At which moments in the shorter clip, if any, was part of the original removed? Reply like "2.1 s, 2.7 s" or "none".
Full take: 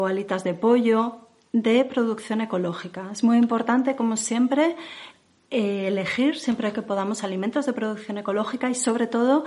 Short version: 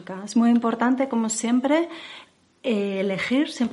none